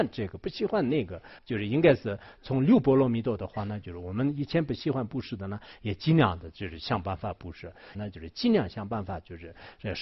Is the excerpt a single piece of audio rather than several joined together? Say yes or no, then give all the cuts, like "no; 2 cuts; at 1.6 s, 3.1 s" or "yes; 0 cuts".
no; 2 cuts; at 1.4 s, 7.9 s